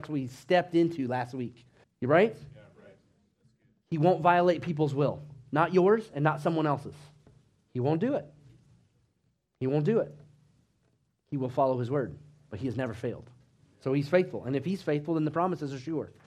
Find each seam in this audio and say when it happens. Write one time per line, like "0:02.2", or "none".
0:01.8